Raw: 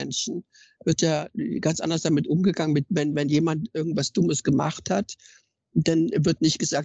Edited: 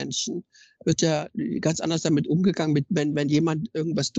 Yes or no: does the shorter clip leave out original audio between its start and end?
no